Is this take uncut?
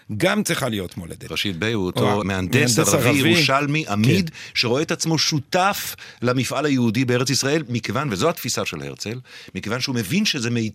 no; 1 cut; at 2.2 s

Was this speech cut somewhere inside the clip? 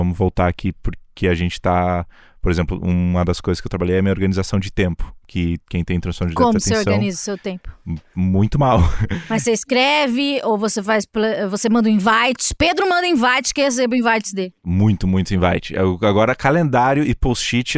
no; 0 cuts

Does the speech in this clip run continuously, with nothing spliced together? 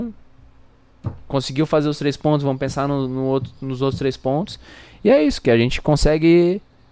yes; 0 cuts

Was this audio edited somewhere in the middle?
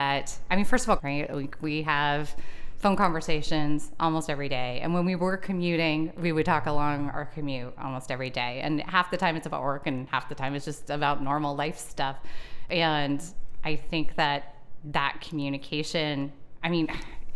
yes; 1 cut; at 1.0 s

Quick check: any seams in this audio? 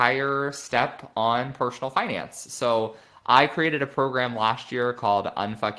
no; 0 cuts

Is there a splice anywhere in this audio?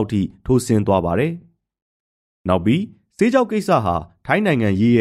no; 0 cuts

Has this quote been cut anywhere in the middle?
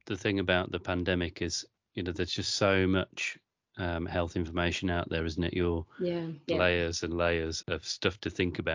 yes; 2 cuts; at 6.5 s, 7.6 s

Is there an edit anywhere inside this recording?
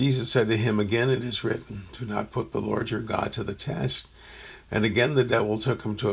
no; 0 cuts

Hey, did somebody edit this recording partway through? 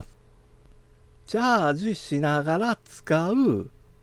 no; 0 cuts

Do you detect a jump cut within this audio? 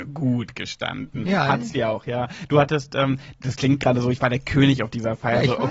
no; 0 cuts

